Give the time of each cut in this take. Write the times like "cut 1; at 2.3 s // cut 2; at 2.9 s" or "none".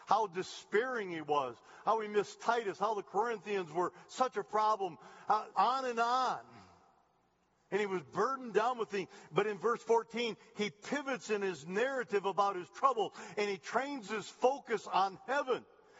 cut 1; at 5.5 s